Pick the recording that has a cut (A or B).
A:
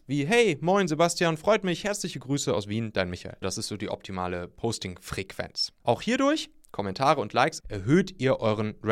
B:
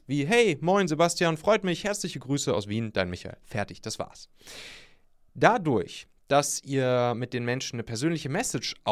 A